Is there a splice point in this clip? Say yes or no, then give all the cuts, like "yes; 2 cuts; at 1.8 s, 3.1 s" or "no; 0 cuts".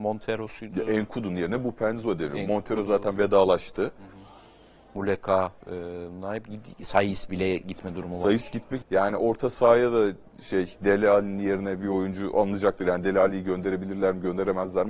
yes; 2 cuts; at 5.6 s, 8.8 s